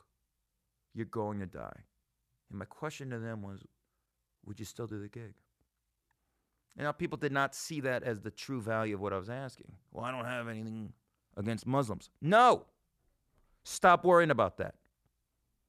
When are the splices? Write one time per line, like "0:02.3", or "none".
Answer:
none

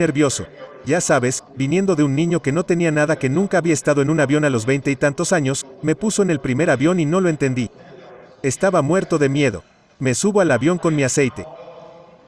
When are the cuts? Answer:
none

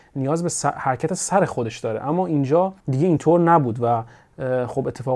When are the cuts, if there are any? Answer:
0:02.8

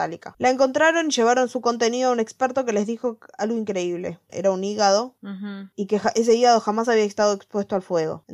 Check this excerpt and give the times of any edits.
0:04.3

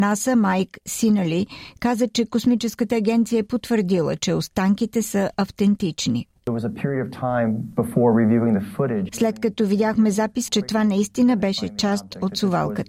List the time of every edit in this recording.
0:09.1
0:10.5

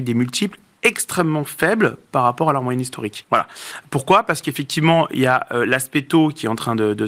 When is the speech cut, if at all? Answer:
0:03.2

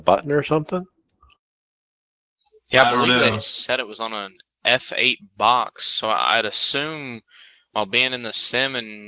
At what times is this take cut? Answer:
none

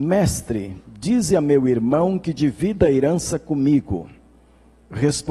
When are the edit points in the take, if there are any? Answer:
none

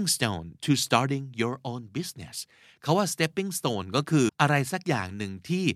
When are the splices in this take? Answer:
0:04.3

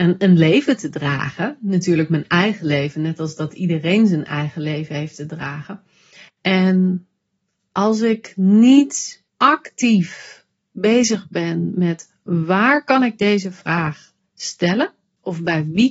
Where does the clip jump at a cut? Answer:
0:06.3
0:09.3

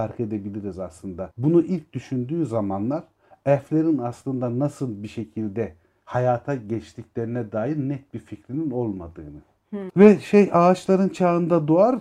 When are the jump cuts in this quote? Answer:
0:09.9

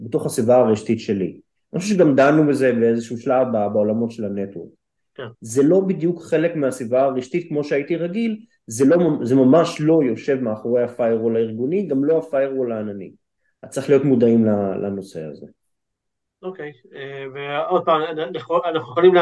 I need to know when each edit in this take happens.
0:05.3

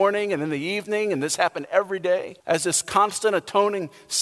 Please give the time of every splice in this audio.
0:02.4

